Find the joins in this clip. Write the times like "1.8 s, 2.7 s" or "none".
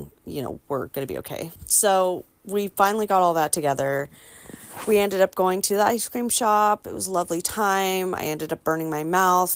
none